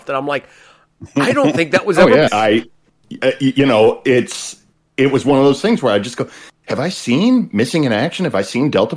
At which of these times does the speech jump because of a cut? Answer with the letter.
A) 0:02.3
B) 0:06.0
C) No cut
A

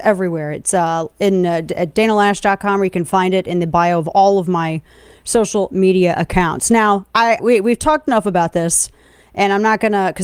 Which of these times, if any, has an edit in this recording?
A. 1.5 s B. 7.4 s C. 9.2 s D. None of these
B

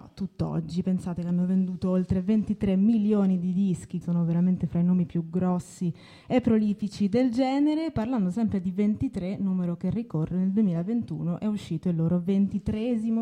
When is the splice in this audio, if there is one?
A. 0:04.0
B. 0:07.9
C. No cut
A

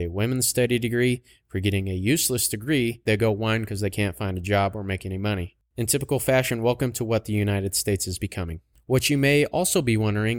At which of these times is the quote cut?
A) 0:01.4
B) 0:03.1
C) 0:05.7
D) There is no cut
B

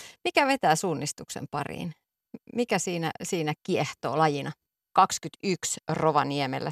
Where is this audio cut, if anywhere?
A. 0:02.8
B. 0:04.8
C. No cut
B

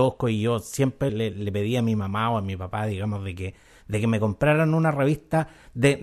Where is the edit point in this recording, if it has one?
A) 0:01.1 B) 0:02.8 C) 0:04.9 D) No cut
A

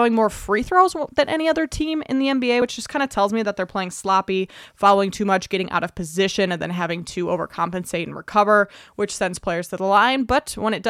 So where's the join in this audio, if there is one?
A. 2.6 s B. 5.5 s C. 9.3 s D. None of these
D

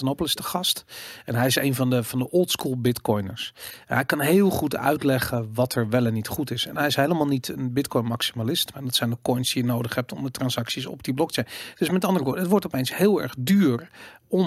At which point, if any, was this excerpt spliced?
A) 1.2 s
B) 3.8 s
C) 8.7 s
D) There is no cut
C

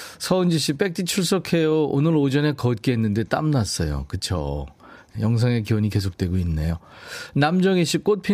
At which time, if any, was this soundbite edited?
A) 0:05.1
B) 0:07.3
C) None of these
A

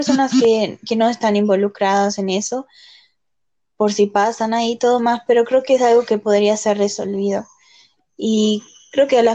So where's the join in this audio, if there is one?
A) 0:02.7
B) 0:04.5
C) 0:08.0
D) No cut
C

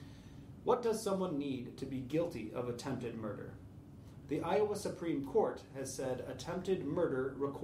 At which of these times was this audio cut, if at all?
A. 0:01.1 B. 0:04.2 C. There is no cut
B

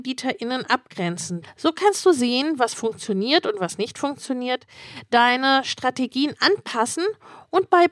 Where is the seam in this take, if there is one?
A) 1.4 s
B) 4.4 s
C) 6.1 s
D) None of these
A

